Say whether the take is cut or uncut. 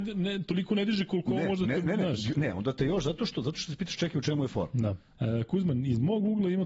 cut